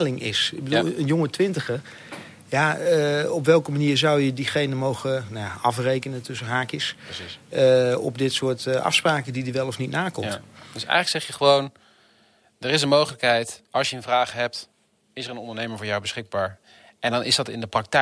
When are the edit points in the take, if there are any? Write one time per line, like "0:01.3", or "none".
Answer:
none